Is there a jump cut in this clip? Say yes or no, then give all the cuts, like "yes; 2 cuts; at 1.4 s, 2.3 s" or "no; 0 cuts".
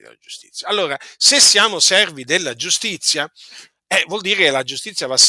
no; 0 cuts